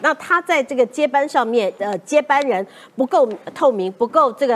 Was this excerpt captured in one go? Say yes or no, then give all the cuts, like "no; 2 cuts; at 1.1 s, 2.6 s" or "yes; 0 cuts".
no; 1 cut; at 1.8 s